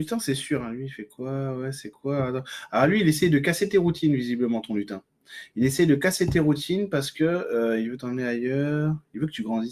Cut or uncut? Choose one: uncut